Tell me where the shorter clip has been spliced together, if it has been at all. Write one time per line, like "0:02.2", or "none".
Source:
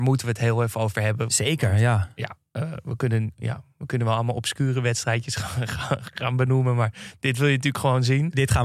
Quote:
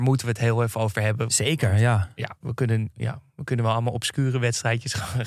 0:02.4